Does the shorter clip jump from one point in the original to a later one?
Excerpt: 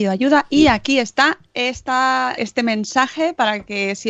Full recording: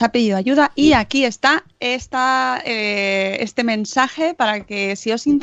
yes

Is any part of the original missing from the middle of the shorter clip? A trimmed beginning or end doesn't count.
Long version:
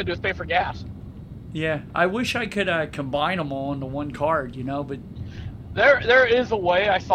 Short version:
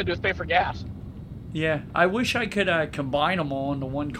no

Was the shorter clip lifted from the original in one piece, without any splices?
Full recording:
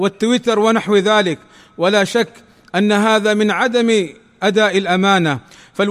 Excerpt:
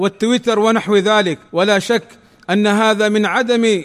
no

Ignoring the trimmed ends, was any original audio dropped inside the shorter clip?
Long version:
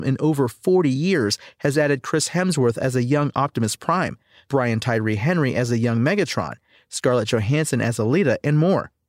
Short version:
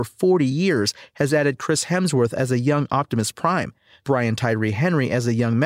no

